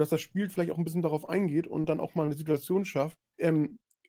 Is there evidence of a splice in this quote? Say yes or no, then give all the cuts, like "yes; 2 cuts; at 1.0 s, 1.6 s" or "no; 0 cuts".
yes; 1 cut; at 3.2 s